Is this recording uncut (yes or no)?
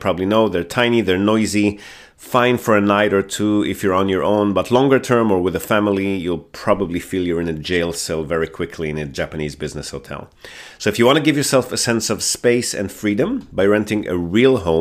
yes